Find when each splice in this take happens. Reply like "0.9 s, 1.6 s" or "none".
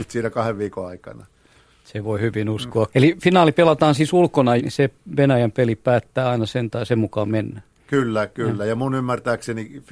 2.9 s, 4.6 s